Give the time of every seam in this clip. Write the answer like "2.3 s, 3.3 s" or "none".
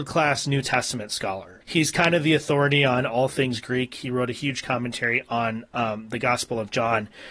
1.6 s